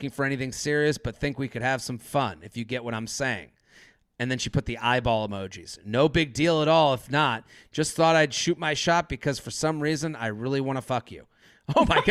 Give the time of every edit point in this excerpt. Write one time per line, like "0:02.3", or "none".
none